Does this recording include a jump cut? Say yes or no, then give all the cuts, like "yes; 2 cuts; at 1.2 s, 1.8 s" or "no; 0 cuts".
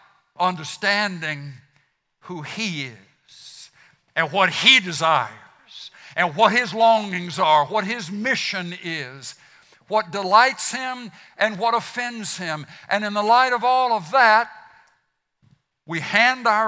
no; 0 cuts